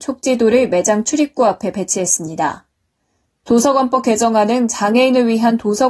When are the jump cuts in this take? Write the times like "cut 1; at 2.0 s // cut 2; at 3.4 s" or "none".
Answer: cut 1; at 3.2 s